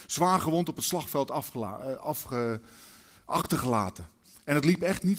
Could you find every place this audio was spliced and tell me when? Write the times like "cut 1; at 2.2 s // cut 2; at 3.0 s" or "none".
none